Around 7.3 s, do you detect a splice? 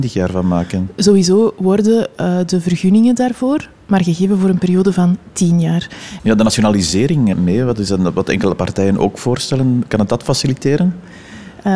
yes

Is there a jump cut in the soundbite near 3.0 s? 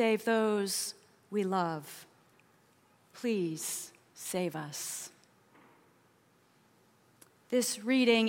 yes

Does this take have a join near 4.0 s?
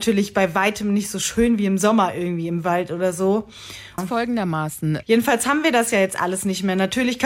yes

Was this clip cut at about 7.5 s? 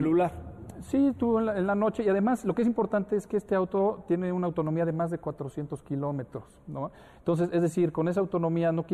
no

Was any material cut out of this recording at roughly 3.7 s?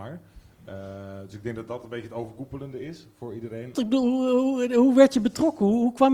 yes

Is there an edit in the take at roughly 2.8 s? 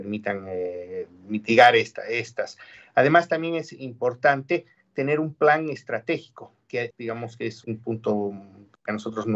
no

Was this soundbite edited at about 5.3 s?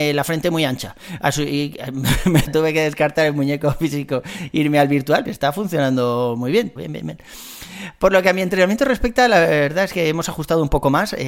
yes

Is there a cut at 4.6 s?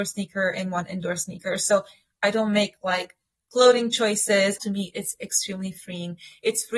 yes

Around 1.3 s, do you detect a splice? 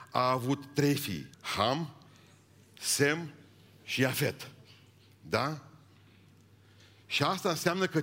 yes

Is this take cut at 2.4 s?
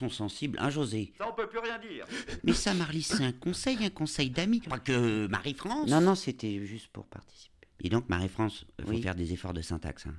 yes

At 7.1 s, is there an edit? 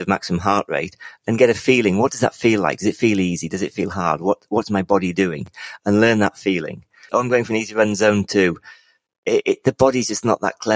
yes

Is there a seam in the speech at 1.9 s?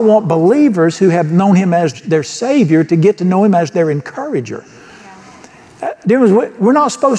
yes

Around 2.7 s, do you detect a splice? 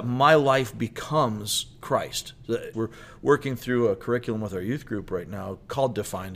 yes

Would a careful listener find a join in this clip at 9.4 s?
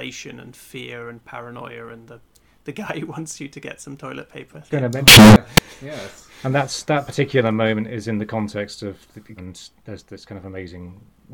yes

